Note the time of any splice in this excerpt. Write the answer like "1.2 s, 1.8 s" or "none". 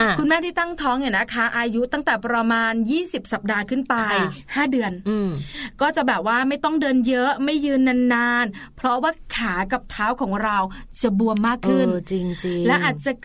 none